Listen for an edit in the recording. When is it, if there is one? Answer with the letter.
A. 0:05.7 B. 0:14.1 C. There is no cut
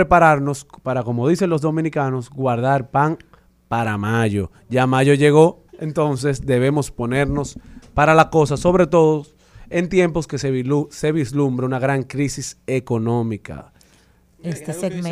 A